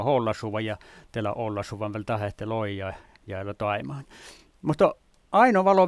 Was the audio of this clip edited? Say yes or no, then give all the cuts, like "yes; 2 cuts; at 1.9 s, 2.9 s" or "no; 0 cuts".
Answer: no; 0 cuts